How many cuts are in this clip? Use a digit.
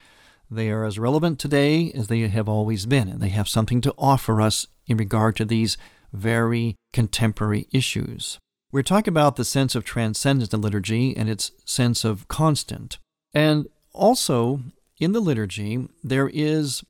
0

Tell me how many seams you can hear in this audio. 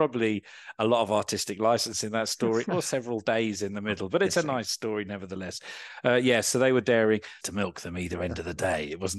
1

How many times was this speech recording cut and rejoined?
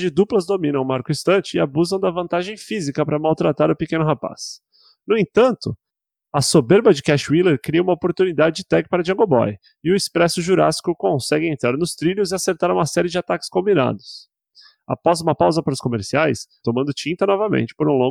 1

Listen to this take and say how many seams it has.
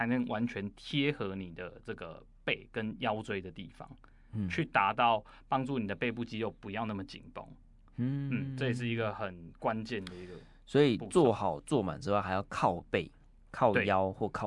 0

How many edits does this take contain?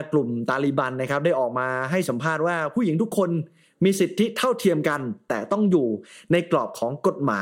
0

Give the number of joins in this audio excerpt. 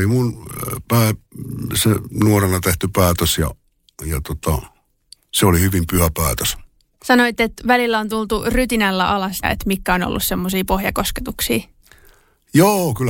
2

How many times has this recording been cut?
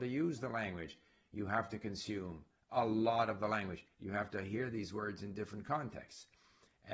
1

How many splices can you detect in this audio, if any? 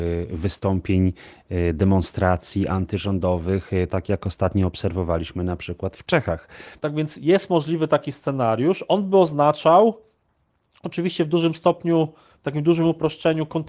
1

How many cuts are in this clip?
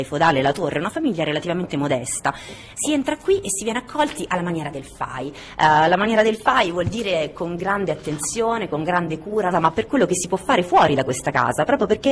2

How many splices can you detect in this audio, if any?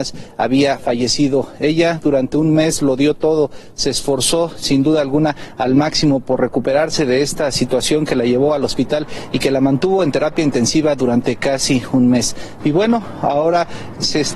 1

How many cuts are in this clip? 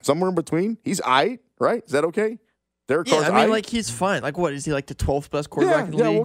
0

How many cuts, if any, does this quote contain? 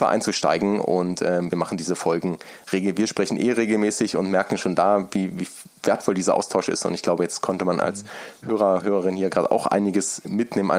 1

